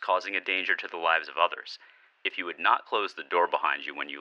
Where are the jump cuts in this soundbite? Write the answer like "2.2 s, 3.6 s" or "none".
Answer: 2.1 s